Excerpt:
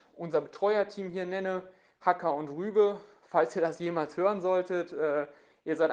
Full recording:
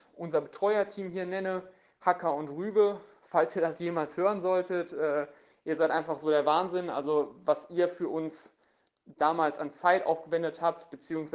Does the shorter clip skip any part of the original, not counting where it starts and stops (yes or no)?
no